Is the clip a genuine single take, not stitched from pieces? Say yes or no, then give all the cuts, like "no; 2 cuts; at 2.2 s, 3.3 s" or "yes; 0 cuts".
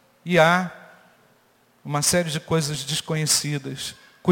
yes; 0 cuts